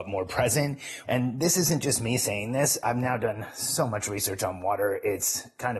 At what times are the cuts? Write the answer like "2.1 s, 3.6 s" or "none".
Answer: 1.0 s